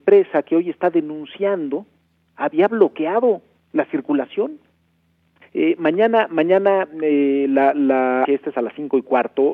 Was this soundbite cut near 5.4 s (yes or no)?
yes